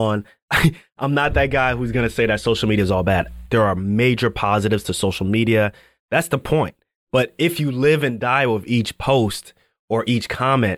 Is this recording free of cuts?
no; 2 cuts; at 3.5 s, 6.0 s

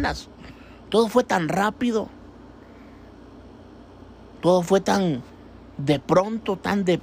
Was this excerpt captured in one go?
yes; 0 cuts

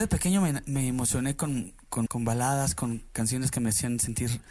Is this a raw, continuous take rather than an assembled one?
no; 1 cut; at 2.1 s

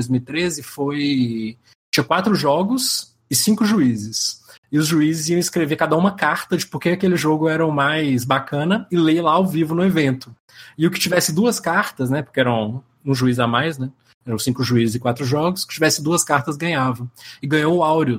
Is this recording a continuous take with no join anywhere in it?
yes; 0 cuts

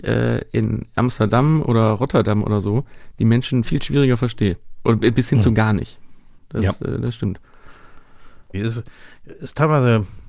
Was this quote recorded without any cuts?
no; 2 cuts; at 3.6 s, 8.5 s

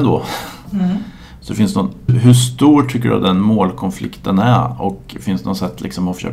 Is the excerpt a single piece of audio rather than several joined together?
no; 1 cut; at 2.1 s

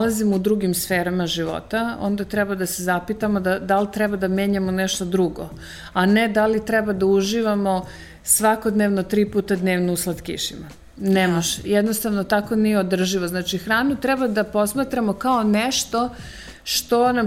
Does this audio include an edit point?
no; 0 cuts

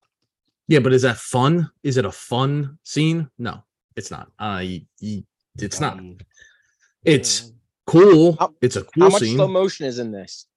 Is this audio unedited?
yes; 0 cuts

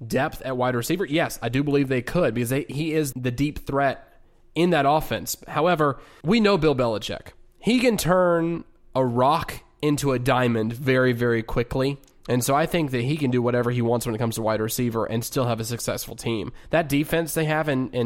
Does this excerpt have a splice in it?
yes; 2 cuts; at 3.1 s, 6.2 s

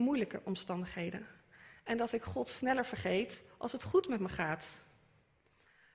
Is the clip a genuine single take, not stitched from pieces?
yes; 0 cuts

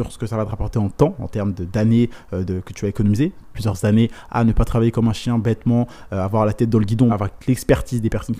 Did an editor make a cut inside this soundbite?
yes; 2 cuts; at 3.5 s, 7.1 s

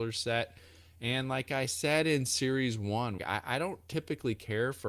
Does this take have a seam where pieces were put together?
yes; 1 cut; at 3.2 s

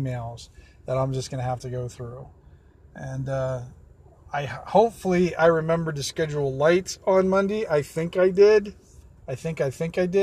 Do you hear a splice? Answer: no; 0 cuts

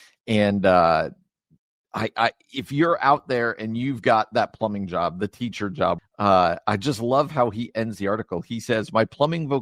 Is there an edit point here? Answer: yes; 1 cut; at 6.0 s

